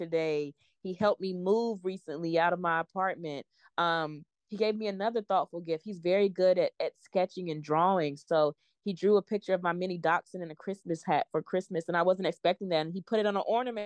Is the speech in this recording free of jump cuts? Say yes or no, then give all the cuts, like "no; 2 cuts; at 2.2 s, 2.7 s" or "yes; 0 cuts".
yes; 0 cuts